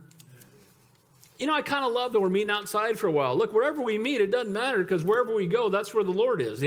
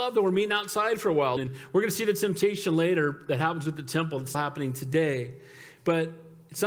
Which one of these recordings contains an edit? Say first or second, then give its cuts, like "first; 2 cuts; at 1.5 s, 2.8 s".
second; 2 cuts; at 1.4 s, 4.3 s